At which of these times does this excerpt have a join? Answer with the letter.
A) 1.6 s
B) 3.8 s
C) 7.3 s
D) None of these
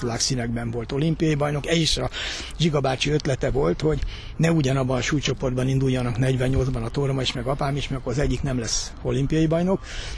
D